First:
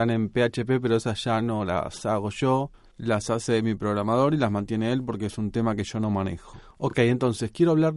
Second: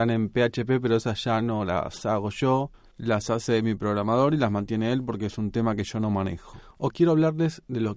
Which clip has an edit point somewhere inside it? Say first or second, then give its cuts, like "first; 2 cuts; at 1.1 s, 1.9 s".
second; 1 cut; at 6.9 s